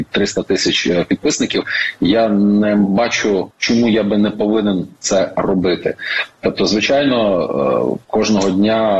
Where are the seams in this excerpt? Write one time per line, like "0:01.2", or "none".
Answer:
none